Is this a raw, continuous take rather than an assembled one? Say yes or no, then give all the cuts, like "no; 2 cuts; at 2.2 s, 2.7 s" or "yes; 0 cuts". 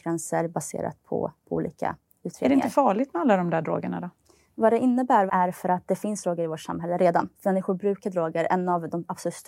no; 2 cuts; at 5.3 s, 7.3 s